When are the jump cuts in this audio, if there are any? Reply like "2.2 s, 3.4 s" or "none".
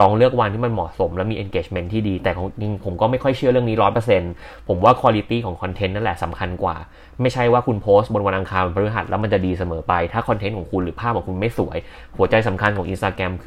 2.6 s